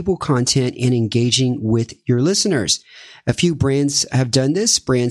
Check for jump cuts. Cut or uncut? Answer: uncut